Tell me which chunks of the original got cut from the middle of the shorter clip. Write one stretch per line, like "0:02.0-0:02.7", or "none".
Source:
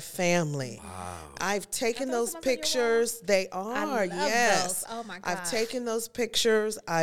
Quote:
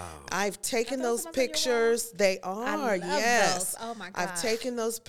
none